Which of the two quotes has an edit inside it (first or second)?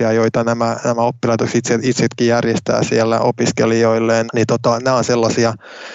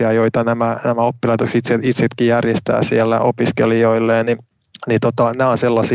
first